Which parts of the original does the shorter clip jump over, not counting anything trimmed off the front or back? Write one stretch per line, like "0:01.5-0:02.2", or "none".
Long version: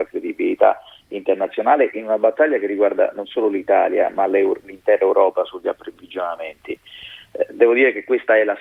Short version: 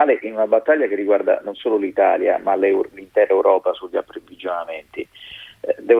none